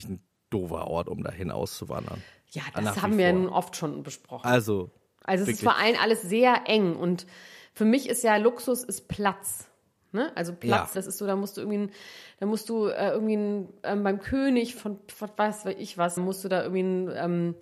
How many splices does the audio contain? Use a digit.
3